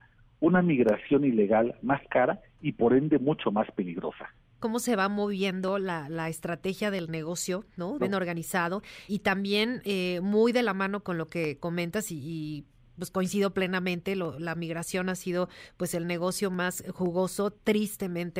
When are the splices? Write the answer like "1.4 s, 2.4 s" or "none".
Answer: 4.6 s, 8.0 s, 9.1 s